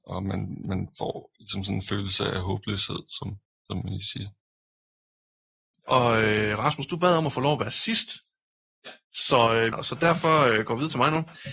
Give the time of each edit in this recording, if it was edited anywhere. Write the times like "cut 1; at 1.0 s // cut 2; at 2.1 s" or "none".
cut 1; at 5.7 s // cut 2; at 9.7 s